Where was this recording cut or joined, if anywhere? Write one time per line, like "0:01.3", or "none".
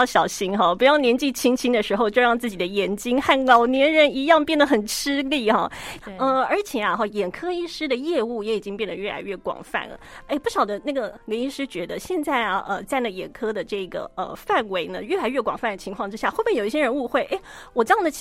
0:06.0